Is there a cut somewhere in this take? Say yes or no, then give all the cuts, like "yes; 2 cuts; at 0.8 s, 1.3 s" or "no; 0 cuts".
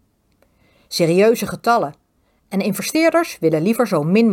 no; 0 cuts